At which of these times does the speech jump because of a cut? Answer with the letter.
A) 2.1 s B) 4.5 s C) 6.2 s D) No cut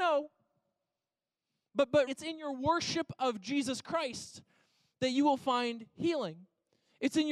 A